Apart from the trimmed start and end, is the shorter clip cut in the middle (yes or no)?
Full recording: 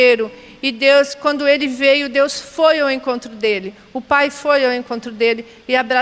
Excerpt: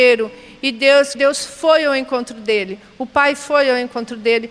yes